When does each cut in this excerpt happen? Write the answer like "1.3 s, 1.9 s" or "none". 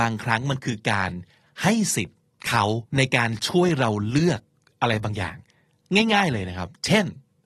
2.9 s

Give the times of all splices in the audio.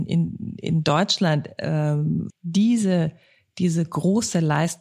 2.3 s

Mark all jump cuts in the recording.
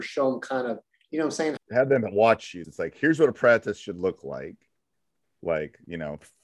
1.6 s, 2.6 s

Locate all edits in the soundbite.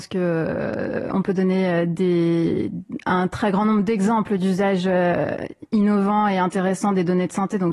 none

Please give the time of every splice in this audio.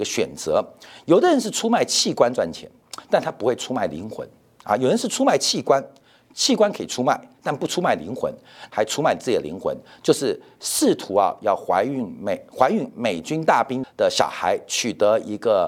8.7 s, 13.8 s

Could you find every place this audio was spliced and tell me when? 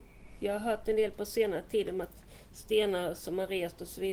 none

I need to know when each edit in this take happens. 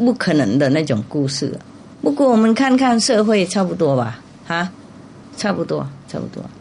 none

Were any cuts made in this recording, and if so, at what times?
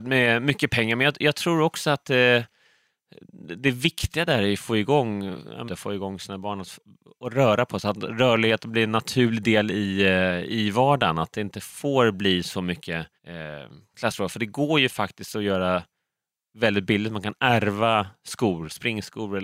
5.7 s, 13.2 s

